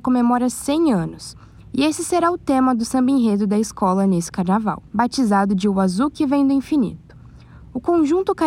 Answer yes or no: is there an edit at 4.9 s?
yes